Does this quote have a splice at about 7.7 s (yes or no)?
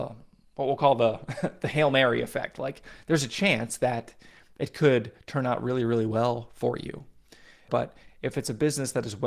yes